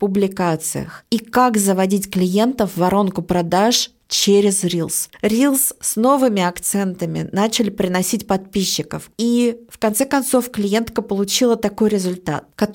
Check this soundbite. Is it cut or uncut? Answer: cut